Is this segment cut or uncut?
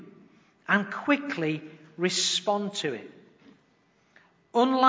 uncut